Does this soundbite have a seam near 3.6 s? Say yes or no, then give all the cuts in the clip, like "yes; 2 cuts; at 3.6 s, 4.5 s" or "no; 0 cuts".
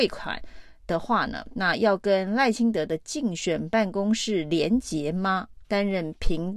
no; 2 cuts; at 1.5 s, 5.6 s